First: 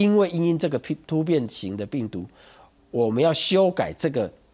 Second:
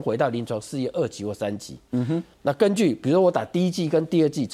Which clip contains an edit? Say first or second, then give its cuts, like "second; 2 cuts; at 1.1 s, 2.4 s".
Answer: second; 1 cut; at 2.3 s